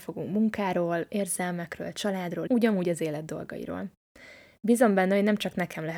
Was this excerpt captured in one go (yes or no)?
no